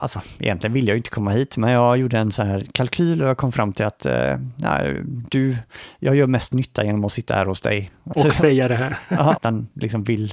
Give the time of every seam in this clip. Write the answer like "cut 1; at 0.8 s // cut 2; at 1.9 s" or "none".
cut 1; at 8.1 s // cut 2; at 9.4 s

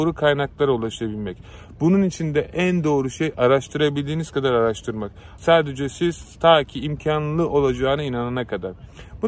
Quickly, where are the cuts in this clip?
cut 1; at 5.4 s

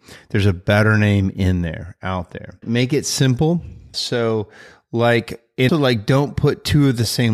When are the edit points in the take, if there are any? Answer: cut 1; at 2.6 s // cut 2; at 3.9 s // cut 3; at 5.7 s

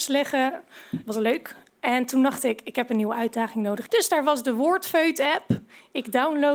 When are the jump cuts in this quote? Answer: cut 1; at 3.9 s

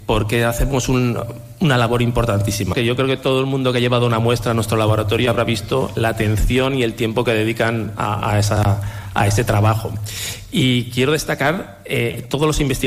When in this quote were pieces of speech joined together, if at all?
cut 1; at 2.7 s

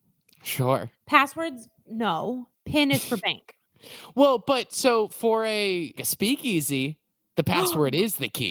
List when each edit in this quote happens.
cut 1; at 1.0 s // cut 2; at 6.0 s

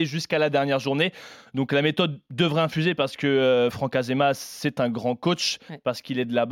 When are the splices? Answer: none

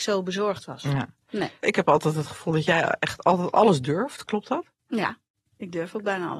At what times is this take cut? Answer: none

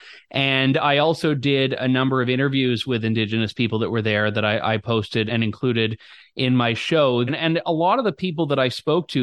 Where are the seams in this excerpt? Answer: cut 1; at 5.3 s // cut 2; at 7.3 s

